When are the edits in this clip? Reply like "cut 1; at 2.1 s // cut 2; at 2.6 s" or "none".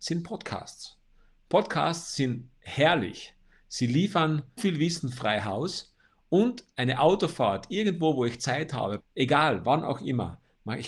cut 1; at 4.6 s // cut 2; at 9.0 s